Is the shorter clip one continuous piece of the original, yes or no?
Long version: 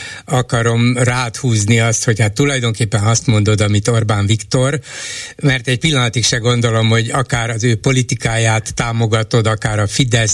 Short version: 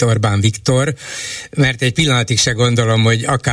yes